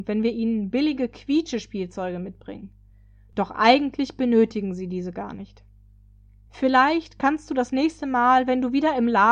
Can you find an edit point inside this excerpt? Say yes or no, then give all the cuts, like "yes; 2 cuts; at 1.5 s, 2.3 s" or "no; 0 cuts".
no; 0 cuts